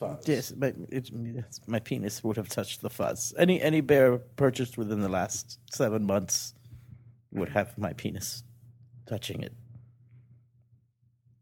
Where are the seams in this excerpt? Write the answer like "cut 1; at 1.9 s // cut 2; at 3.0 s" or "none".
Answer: cut 1; at 1.6 s

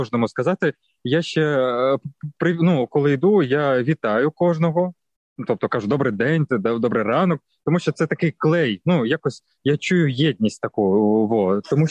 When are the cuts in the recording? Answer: cut 1; at 6.5 s

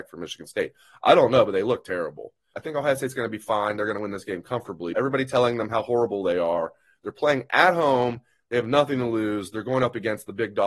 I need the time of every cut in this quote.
cut 1; at 2.5 s // cut 2; at 4.9 s

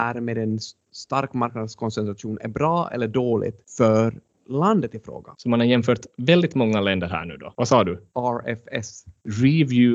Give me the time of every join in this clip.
cut 1; at 5.3 s // cut 2; at 7.5 s

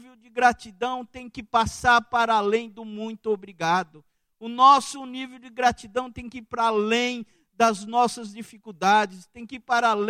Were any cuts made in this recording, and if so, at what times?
none

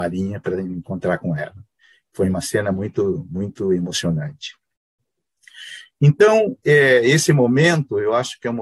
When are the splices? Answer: none

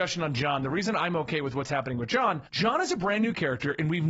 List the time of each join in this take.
cut 1; at 2.5 s

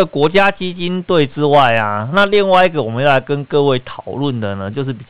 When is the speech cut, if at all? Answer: none

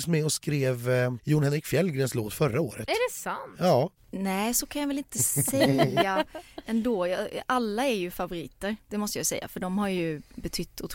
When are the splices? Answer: cut 1; at 4.0 s

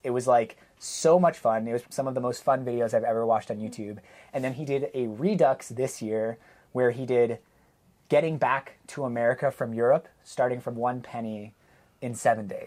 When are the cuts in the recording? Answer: cut 1; at 1.8 s

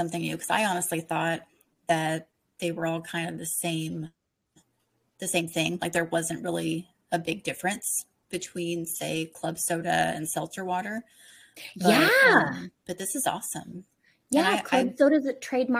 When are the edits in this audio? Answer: none

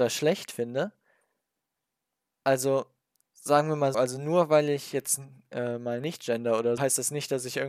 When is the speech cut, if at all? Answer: cut 1; at 3.9 s // cut 2; at 6.8 s

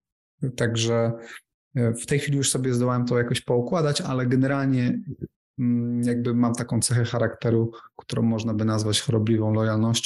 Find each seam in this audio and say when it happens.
none

